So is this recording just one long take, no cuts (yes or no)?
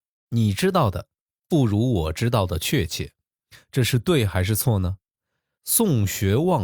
no